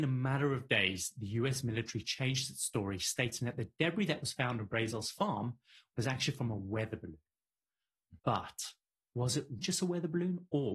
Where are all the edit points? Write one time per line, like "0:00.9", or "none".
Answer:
0:08.2
0:09.6